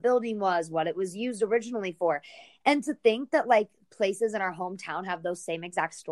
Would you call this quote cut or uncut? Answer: uncut